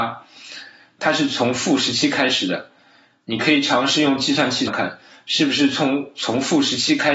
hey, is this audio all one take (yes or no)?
no